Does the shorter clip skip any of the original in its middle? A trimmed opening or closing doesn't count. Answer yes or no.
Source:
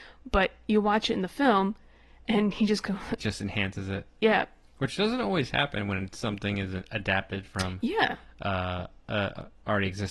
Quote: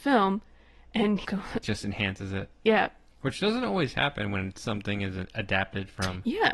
yes